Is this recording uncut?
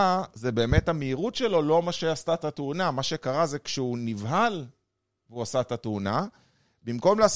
yes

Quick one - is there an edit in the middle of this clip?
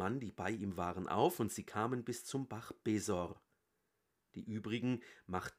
no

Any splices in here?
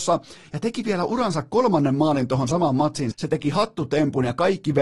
yes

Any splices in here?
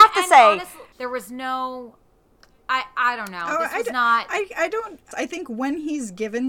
yes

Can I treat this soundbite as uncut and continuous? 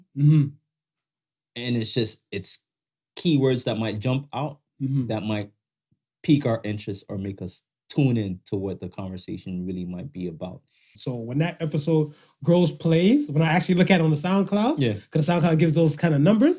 no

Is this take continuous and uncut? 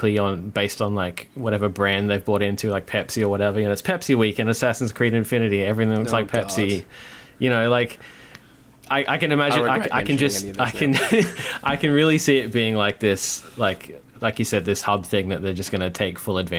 yes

